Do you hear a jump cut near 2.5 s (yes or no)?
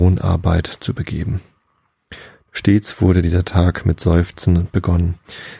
yes